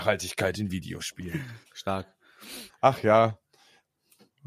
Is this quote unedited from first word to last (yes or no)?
no